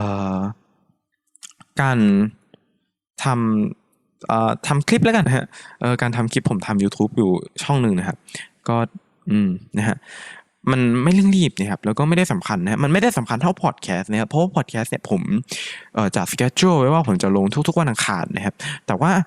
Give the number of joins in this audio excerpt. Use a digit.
1